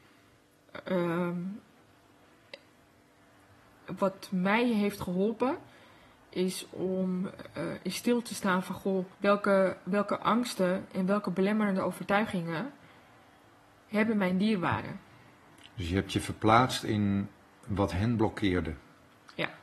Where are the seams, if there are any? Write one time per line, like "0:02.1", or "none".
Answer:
0:04.0
0:09.1